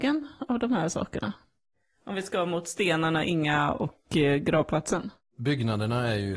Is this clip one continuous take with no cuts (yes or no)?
yes